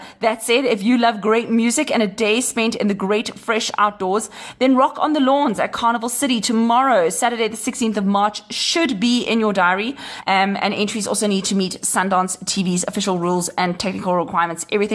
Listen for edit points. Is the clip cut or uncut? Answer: cut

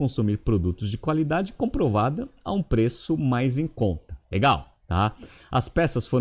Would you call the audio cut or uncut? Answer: uncut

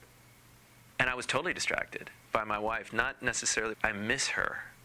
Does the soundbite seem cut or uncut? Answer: cut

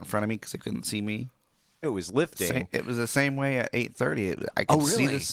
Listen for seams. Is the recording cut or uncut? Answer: cut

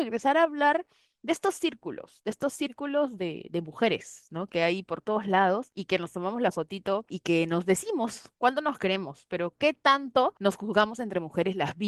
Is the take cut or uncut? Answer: uncut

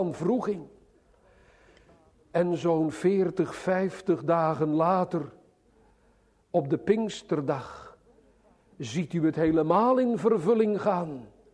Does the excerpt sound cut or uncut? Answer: uncut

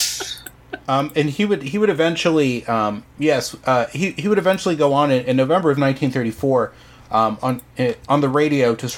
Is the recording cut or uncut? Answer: uncut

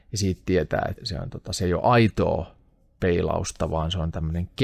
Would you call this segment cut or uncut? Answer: cut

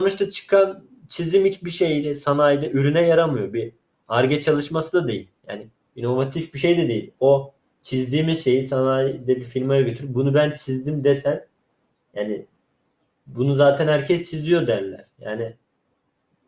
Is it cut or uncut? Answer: uncut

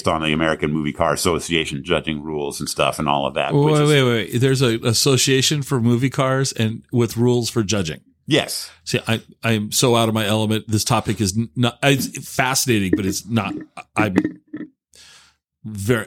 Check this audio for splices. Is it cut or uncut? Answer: uncut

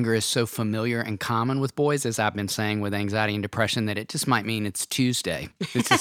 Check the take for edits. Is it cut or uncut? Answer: uncut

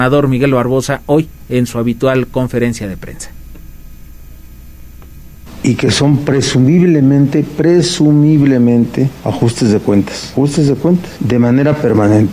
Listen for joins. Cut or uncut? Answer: uncut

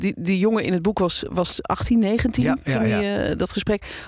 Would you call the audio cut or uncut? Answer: uncut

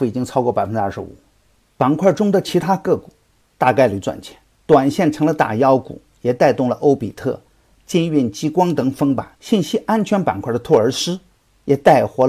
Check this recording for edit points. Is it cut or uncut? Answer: cut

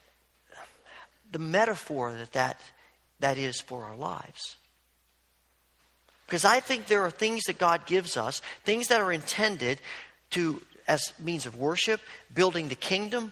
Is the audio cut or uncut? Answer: uncut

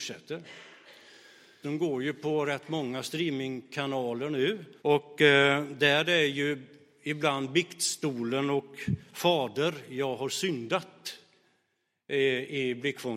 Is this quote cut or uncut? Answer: cut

